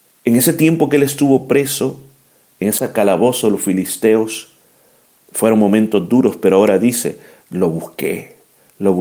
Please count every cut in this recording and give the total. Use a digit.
0